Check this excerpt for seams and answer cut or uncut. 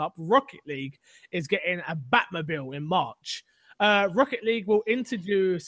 uncut